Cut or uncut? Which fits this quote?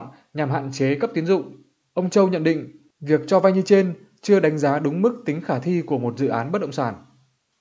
cut